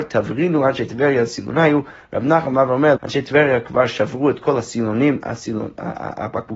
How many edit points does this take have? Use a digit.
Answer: 1